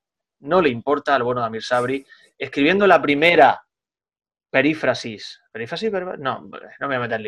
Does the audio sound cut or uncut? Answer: uncut